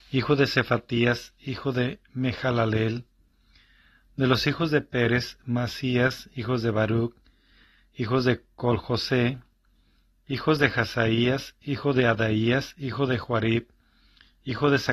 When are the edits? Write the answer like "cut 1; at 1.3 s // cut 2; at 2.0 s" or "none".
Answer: none